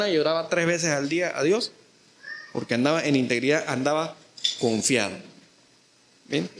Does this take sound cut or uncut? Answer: uncut